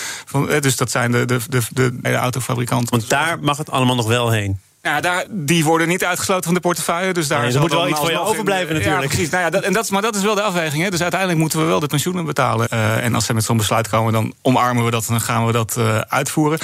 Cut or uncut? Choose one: cut